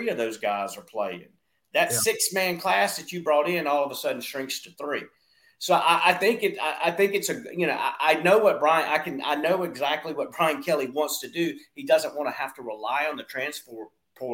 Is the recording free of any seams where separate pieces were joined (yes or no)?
yes